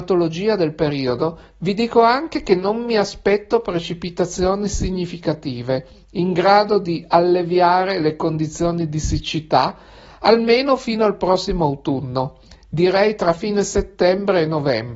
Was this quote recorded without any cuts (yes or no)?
yes